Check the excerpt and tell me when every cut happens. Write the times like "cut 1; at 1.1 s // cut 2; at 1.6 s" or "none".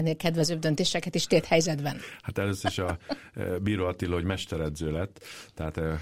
none